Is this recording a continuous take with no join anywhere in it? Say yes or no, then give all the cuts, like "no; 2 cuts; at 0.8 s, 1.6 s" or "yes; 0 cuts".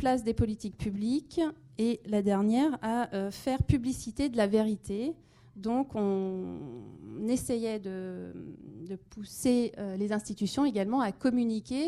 yes; 0 cuts